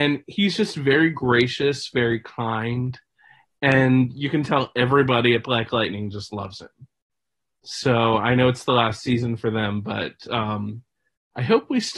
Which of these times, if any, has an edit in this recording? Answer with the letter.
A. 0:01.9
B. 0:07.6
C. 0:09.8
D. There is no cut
D